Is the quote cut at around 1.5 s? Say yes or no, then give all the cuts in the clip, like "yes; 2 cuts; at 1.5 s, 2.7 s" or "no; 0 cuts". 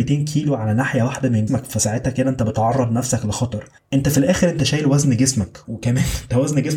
yes; 1 cut; at 1.5 s